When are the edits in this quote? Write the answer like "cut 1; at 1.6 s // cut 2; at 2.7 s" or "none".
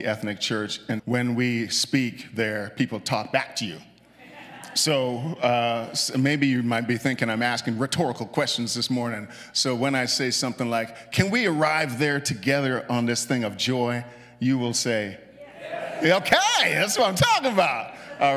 cut 1; at 1.0 s